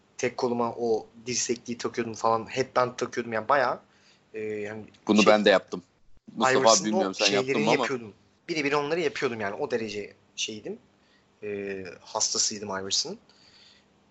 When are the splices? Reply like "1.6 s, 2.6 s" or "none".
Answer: 8.4 s